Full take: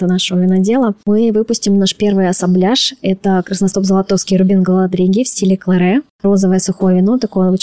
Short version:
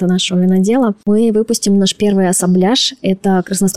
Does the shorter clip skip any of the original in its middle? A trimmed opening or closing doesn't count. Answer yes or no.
no